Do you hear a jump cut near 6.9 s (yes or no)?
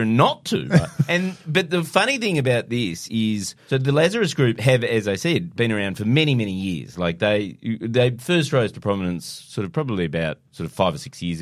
no